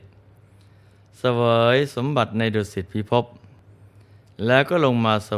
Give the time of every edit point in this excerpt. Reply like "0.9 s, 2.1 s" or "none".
none